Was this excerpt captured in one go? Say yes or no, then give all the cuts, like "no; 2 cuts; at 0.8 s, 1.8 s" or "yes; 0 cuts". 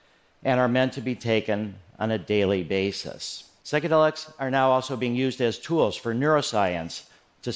no; 1 cut; at 3.6 s